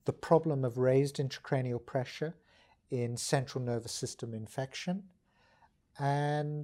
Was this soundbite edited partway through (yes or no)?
no